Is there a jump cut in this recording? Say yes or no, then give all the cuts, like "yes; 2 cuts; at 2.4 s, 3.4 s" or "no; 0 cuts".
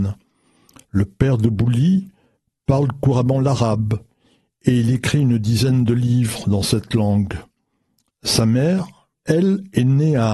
yes; 1 cut; at 9.1 s